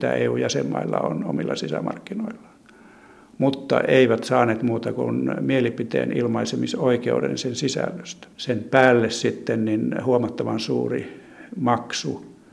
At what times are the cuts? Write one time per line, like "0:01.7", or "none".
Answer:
0:08.3

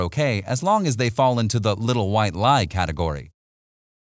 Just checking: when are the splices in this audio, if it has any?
none

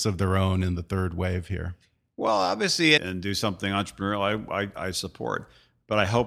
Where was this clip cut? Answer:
0:03.0
0:04.7

